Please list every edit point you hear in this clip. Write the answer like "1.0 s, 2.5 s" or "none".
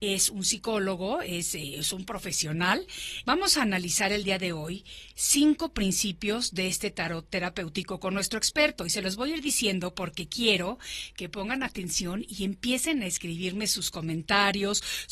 3.2 s